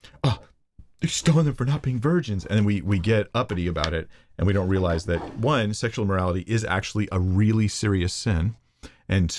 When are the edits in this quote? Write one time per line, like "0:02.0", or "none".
none